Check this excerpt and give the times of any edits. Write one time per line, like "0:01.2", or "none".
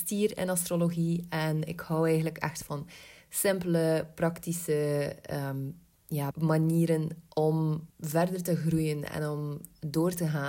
0:06.3
0:07.9